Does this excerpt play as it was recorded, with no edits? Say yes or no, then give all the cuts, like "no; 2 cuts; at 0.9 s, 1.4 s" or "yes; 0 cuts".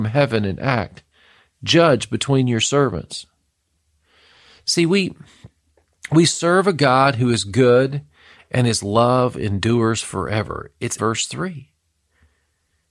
no; 1 cut; at 11.0 s